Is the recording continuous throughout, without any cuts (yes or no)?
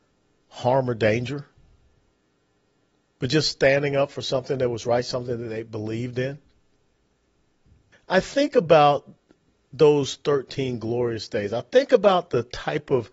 no